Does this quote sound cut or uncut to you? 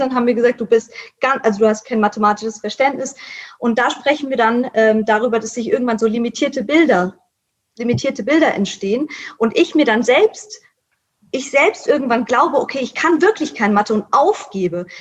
uncut